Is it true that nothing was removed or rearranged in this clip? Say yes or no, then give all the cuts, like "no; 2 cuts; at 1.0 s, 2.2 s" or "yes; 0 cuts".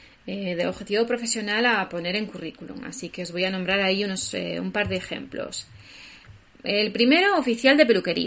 yes; 0 cuts